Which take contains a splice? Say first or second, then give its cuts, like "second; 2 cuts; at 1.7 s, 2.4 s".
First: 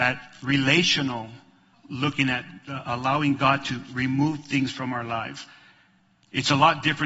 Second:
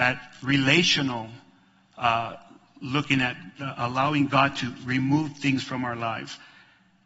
first; 1 cut; at 1.7 s